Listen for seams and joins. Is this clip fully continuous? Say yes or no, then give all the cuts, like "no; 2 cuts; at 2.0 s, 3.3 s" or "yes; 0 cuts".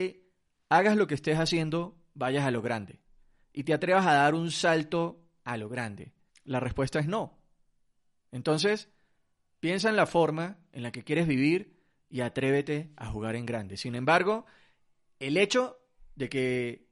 no; 1 cut; at 6.3 s